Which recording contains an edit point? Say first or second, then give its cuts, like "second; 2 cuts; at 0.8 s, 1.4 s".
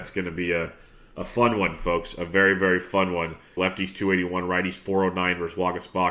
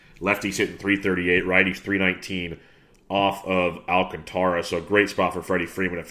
first; 1 cut; at 3.6 s